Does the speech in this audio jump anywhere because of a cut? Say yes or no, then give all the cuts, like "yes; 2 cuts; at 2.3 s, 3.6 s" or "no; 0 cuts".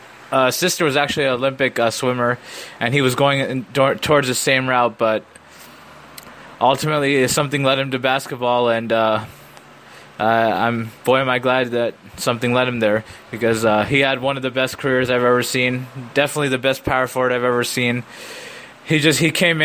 yes; 1 cut; at 18.7 s